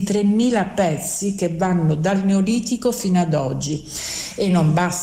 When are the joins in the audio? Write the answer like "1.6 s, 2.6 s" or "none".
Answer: none